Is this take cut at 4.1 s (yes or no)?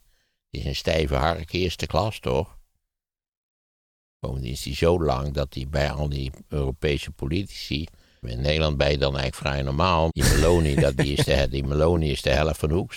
no